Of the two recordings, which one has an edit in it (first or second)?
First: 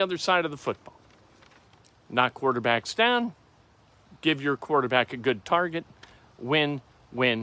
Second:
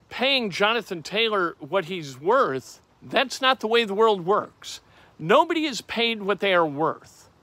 second